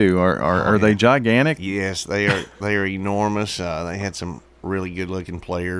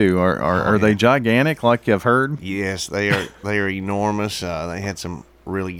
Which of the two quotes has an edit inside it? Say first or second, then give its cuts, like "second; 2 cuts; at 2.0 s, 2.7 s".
first; 1 cut; at 1.6 s